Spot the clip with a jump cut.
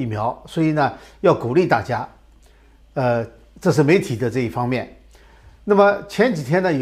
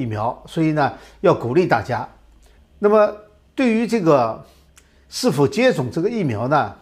second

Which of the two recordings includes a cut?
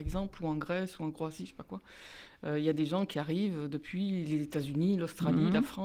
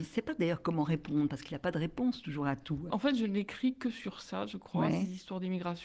second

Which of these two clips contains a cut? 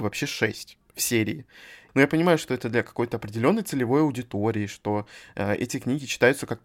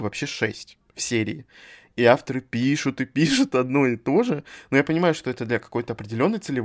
first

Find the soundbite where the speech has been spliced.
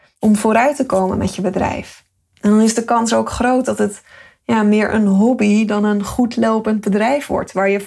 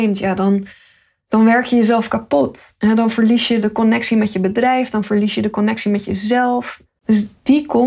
second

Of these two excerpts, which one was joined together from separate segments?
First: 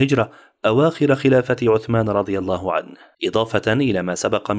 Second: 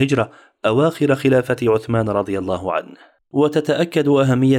first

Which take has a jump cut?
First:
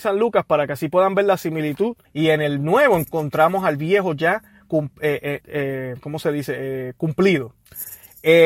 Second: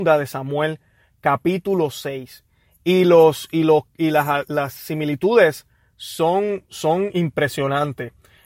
first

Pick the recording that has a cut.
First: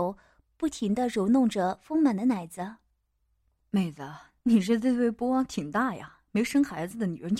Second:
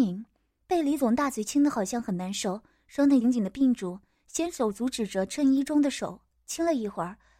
second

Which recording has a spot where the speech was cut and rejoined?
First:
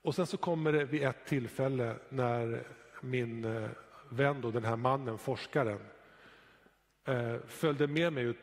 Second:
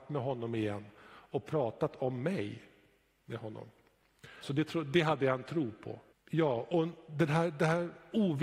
second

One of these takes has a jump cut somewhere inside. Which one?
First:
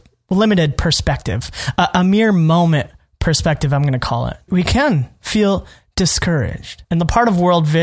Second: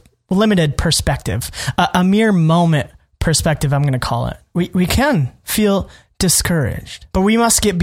first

